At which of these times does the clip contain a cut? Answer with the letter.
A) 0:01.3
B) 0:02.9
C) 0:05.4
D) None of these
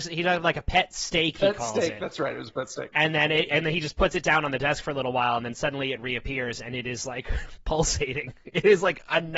D